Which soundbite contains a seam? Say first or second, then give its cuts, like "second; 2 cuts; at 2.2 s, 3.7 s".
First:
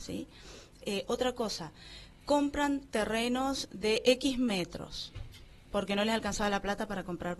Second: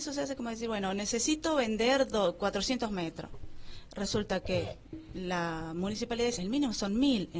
second; 1 cut; at 6.4 s